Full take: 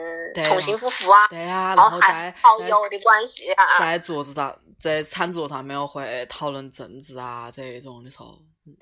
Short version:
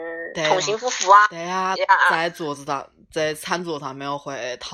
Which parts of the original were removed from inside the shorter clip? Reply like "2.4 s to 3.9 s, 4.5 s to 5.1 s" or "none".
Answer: 1.8 s to 3.4 s